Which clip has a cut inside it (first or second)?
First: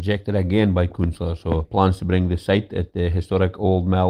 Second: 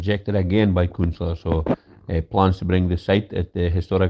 first